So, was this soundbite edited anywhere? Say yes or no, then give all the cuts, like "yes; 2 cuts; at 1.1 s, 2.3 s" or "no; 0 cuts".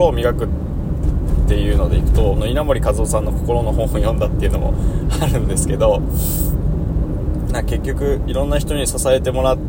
yes; 1 cut; at 2.4 s